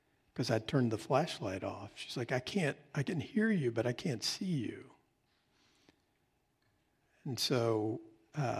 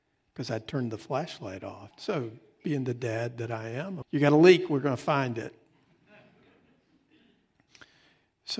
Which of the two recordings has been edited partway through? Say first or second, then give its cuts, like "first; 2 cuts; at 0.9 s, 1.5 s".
second; 2 cuts; at 1.9 s, 4.0 s